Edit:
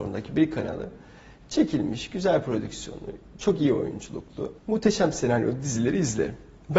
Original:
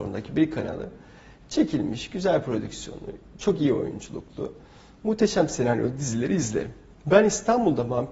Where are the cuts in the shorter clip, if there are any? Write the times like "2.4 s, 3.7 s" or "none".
4.6 s